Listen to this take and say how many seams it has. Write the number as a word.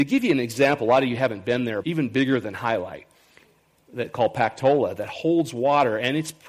one